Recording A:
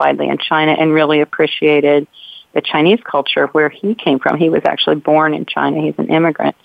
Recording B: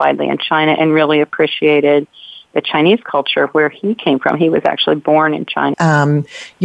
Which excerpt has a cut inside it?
B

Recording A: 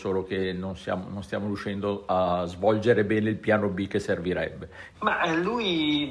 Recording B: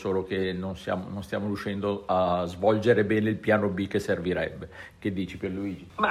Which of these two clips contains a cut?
A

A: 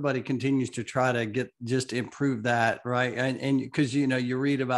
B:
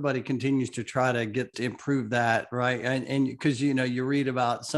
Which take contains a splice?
B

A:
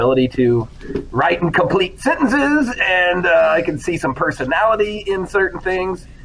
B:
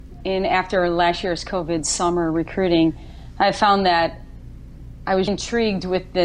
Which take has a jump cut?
B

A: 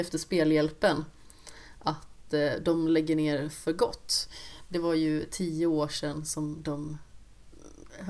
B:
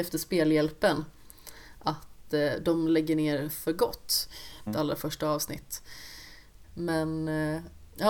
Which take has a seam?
B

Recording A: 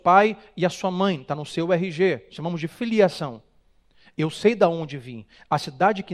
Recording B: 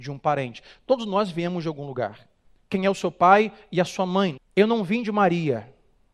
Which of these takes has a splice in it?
B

